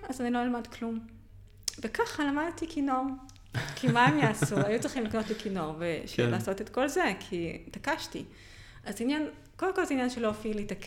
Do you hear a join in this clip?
no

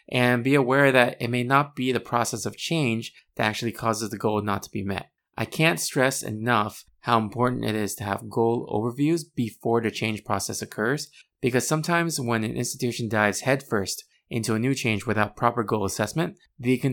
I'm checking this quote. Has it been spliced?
no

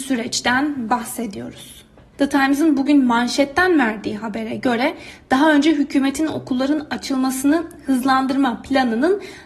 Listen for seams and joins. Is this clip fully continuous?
no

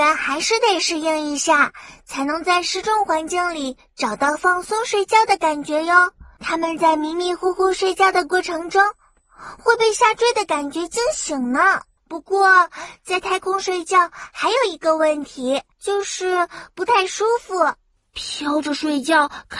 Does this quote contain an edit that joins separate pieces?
yes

